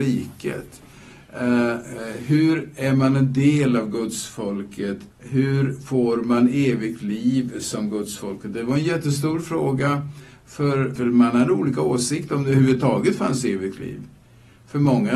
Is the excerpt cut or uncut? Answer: cut